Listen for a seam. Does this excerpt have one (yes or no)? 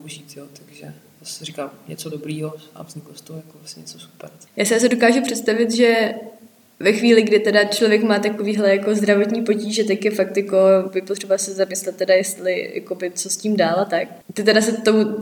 no